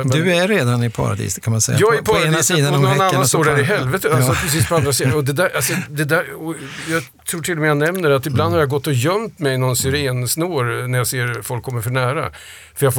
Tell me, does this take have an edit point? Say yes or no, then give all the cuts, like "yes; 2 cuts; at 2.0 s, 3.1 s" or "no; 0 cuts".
no; 0 cuts